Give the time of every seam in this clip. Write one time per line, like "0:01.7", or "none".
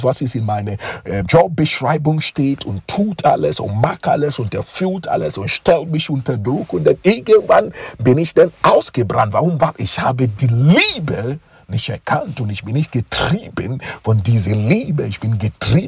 0:01.3